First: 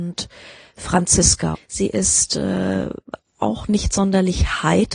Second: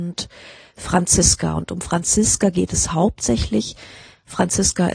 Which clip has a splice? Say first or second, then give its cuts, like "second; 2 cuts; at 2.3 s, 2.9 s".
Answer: first; 1 cut; at 1.5 s